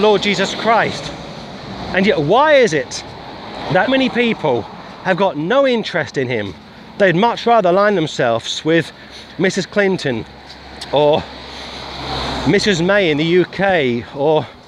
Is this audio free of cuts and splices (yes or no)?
no